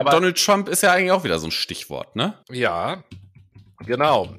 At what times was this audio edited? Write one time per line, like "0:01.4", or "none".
0:02.4